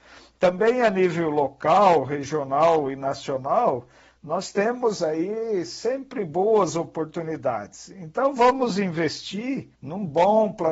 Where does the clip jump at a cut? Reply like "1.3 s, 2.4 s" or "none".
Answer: 9.7 s